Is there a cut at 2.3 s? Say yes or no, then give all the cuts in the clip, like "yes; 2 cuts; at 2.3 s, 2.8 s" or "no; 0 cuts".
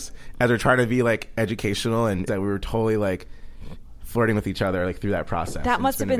yes; 1 cut; at 2.3 s